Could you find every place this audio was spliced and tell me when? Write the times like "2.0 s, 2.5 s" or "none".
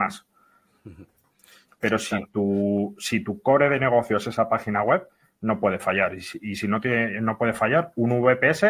1.7 s